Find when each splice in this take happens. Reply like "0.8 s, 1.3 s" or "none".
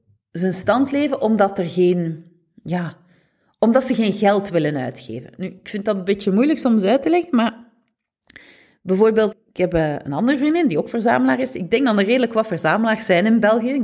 9.3 s